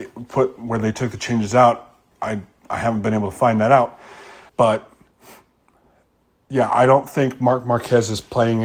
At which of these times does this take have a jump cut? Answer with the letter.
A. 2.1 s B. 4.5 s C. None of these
B